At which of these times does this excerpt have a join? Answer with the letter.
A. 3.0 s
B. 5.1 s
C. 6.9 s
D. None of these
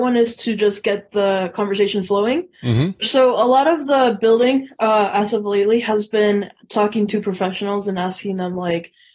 A